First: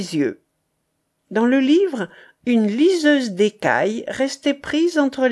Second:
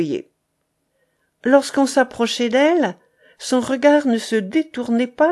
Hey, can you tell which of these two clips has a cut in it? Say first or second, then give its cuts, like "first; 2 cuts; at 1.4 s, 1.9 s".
first; 1 cut; at 1.1 s